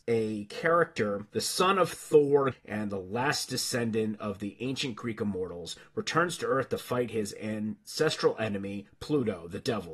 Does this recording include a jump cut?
yes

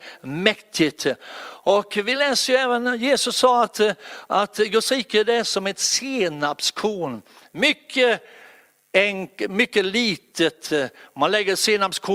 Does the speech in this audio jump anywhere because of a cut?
no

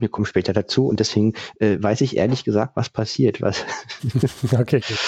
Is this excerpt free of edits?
yes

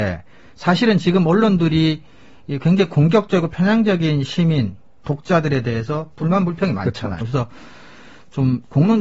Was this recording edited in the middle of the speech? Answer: yes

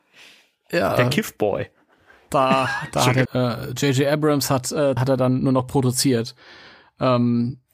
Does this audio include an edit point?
yes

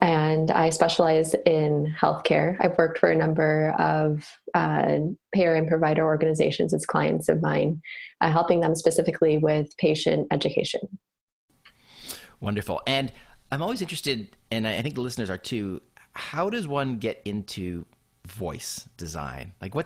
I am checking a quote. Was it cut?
no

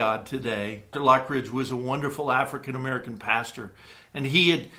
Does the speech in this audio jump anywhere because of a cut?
yes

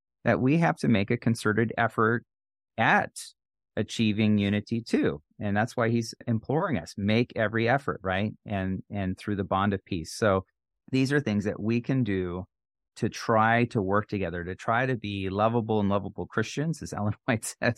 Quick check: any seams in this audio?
no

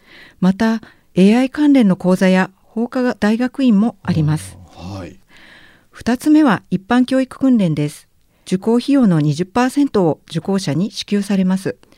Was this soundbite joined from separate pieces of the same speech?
no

